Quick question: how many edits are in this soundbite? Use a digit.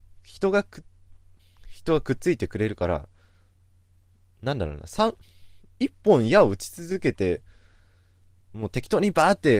1